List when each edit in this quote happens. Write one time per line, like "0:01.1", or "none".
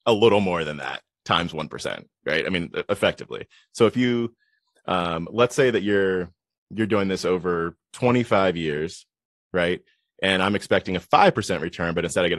none